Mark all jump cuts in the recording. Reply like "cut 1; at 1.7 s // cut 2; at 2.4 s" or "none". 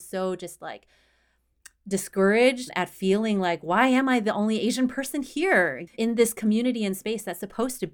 cut 1; at 5.9 s